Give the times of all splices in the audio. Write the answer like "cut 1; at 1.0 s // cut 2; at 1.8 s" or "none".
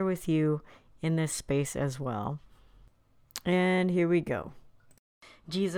none